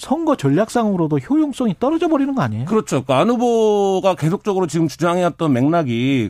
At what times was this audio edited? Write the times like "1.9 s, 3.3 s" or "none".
none